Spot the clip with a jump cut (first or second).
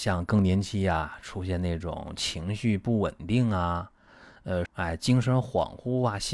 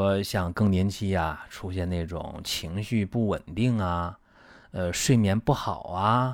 first